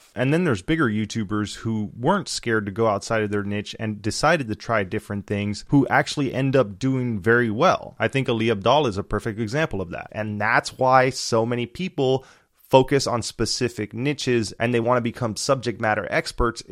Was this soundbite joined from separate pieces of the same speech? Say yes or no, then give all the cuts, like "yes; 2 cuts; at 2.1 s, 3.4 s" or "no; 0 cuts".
yes; 1 cut; at 10.1 s